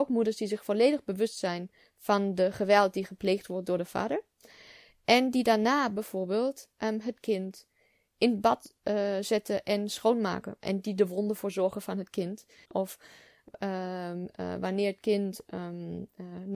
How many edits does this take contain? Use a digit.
1